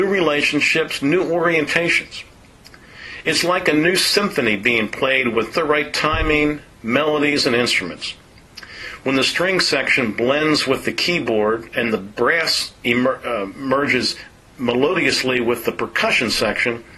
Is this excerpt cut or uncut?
cut